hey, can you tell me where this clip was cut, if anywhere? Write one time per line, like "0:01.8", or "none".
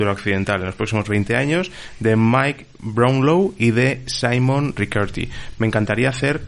none